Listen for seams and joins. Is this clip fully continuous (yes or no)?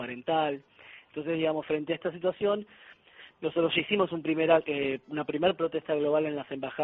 yes